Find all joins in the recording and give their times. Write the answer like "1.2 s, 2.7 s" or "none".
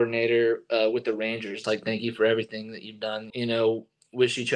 1.6 s, 3.3 s